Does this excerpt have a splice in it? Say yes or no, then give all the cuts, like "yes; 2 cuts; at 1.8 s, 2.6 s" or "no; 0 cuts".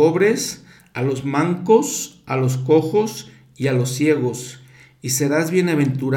no; 0 cuts